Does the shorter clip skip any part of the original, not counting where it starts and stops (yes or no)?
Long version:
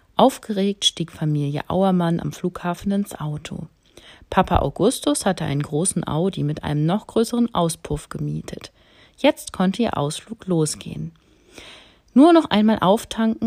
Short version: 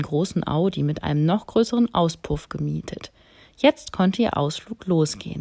no